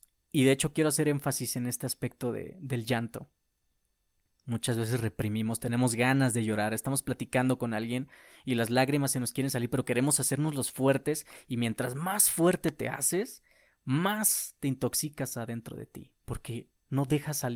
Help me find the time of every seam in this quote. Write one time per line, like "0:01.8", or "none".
none